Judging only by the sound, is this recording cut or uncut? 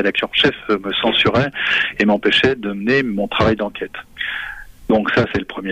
uncut